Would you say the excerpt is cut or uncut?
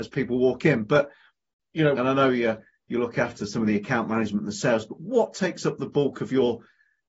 cut